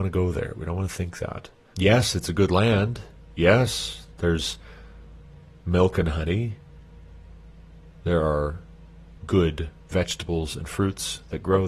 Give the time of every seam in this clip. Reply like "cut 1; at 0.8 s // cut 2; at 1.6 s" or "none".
cut 1; at 1.7 s // cut 2; at 9.2 s

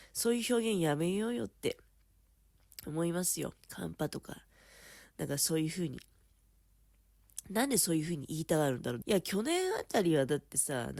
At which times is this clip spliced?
cut 1; at 3.6 s // cut 2; at 9.0 s

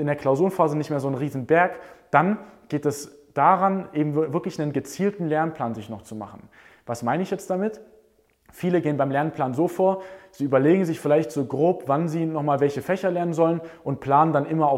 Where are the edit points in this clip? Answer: none

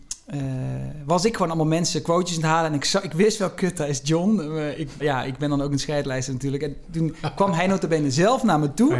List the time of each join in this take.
cut 1; at 5.0 s

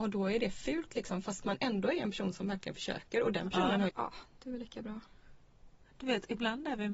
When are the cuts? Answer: cut 1; at 3.9 s

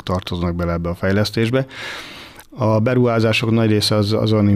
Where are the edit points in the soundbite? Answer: cut 1; at 2.4 s

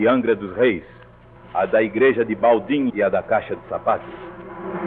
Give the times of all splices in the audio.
cut 1; at 1.4 s // cut 2; at 2.9 s

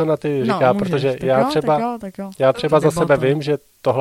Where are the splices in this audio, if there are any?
none

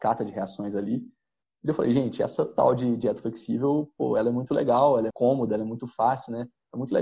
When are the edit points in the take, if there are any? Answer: cut 1; at 5.1 s

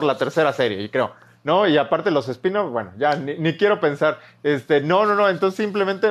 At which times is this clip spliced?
none

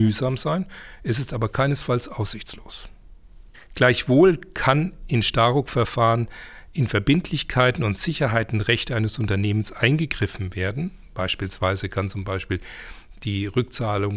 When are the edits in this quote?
cut 1; at 3.5 s

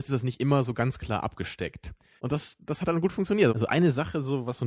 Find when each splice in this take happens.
cut 1; at 2.2 s // cut 2; at 3.5 s

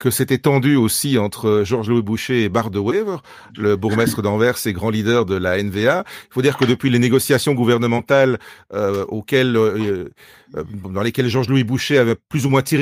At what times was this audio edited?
none

